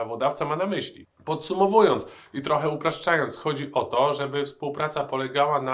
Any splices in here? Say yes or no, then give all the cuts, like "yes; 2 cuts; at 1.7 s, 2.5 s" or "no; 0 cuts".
no; 0 cuts